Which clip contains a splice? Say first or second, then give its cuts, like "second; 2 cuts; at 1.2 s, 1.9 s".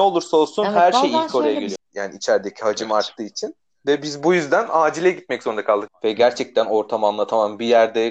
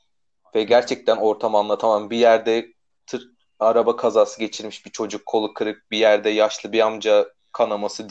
first; 2 cuts; at 1.8 s, 5.9 s